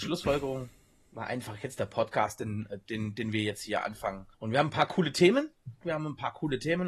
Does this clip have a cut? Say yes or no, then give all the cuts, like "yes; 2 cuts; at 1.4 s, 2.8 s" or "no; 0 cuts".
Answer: yes; 2 cuts; at 4.3 s, 5.8 s